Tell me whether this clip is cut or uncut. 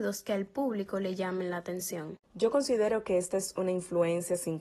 uncut